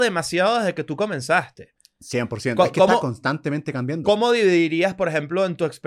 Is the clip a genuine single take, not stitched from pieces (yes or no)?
yes